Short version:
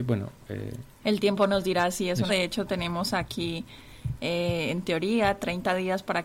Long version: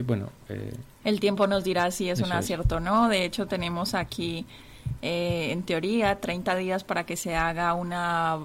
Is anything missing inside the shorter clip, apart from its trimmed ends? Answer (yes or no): yes